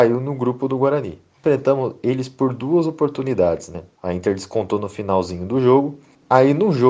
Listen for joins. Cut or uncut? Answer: cut